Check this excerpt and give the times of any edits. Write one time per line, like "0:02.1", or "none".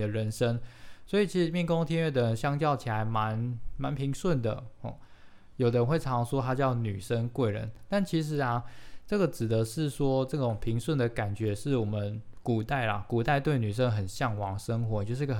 0:05.5

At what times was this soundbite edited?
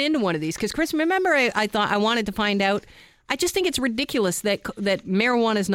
none

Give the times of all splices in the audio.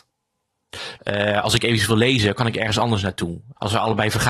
0:01.0

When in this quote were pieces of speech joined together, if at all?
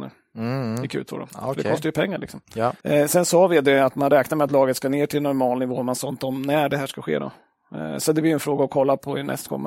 0:02.8

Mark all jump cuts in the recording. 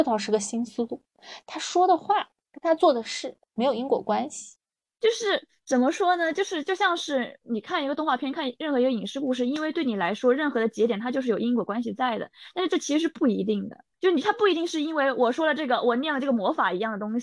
0:13.9

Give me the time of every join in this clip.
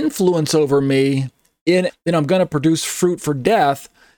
0:01.9

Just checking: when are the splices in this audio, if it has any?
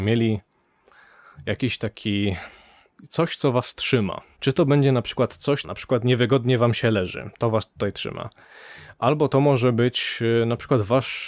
0:04.4
0:05.6

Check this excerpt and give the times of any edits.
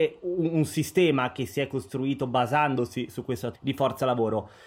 0:03.5

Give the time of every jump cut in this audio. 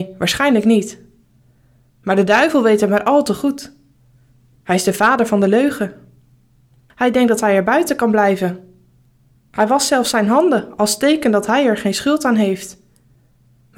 0:06.9

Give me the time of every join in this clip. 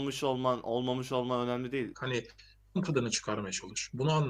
0:01.9

